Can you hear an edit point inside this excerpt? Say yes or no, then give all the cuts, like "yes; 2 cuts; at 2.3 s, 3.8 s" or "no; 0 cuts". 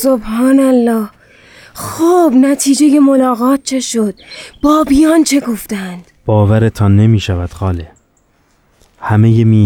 no; 0 cuts